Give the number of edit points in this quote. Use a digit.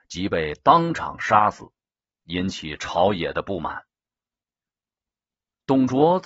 0